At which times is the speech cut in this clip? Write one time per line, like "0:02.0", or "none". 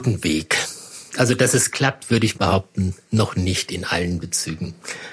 none